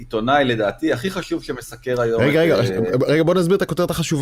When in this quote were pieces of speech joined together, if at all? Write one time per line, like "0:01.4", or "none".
none